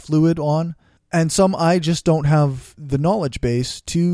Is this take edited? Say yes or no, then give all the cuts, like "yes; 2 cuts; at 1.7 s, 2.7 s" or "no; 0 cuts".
no; 0 cuts